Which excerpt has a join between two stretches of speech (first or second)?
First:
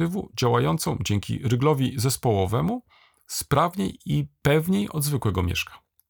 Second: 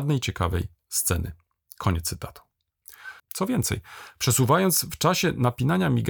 second